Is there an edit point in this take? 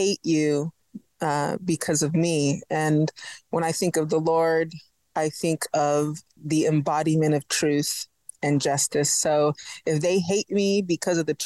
no; 0 cuts

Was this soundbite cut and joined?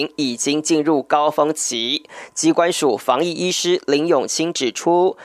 no; 0 cuts

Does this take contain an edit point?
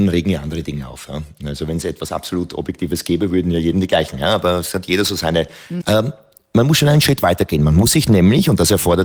yes; 1 cut; at 5.8 s

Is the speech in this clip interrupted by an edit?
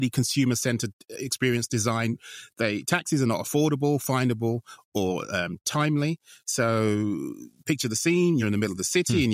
no; 0 cuts

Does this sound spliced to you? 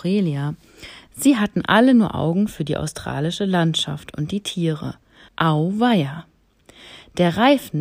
yes; 1 cut; at 5.3 s

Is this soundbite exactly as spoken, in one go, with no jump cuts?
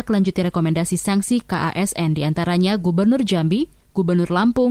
yes; 0 cuts

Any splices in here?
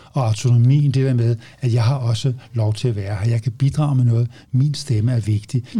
no; 0 cuts

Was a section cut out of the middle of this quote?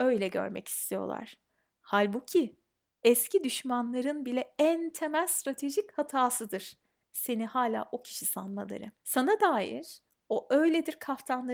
yes; 1 cut; at 9.0 s

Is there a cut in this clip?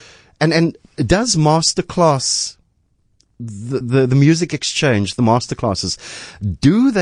no; 0 cuts

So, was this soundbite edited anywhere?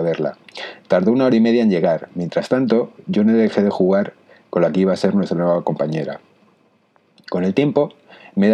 no; 0 cuts

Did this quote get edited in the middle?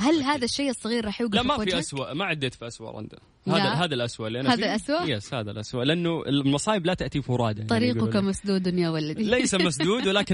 no; 0 cuts

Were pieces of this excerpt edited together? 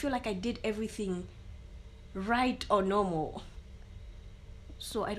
no; 0 cuts

